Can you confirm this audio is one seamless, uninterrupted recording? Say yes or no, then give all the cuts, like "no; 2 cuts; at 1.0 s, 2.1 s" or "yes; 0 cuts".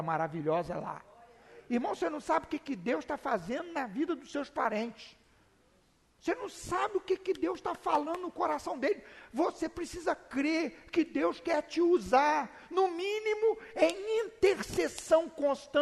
yes; 0 cuts